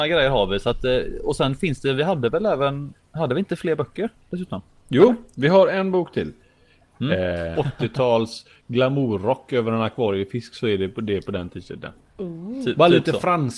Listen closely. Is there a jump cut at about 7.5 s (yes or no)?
yes